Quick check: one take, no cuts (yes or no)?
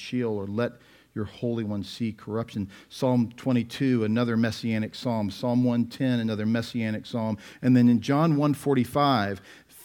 yes